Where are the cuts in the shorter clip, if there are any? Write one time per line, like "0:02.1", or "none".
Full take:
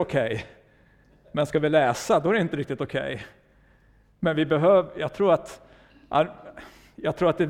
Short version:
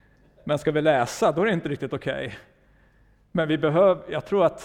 none